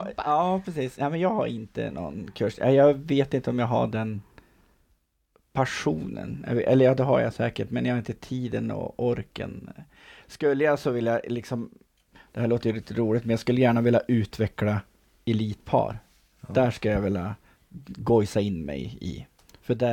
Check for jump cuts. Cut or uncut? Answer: uncut